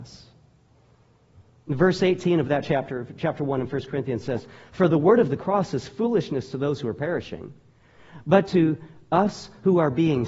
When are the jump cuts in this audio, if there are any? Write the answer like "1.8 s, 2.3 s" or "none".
none